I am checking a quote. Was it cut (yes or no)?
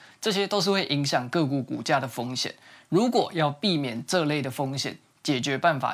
no